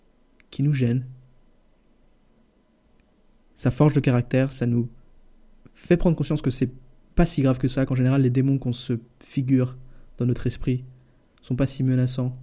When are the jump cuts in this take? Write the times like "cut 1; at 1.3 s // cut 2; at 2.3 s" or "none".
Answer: none

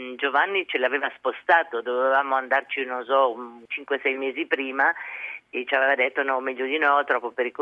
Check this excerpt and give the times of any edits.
cut 1; at 3.7 s

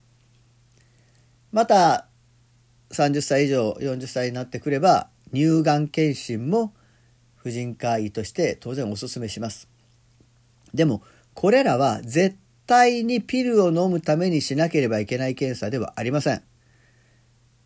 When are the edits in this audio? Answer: none

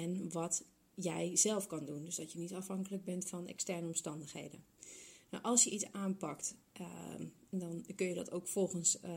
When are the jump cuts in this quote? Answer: none

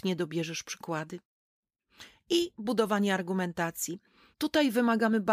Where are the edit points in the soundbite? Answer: cut 1; at 4.3 s

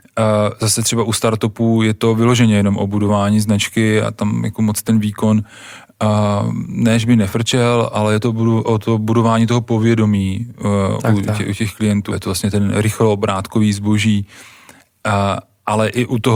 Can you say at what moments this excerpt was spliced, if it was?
cut 1; at 12.1 s

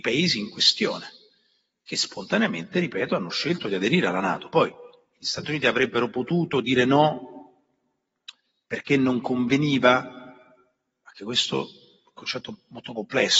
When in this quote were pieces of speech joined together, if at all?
none

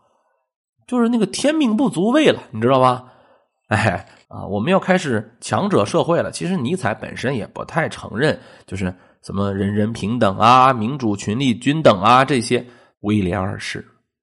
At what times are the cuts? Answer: cut 1; at 4.2 s // cut 2; at 12.9 s

